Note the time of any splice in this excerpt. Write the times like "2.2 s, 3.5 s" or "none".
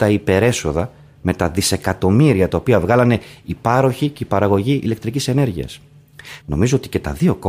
6.4 s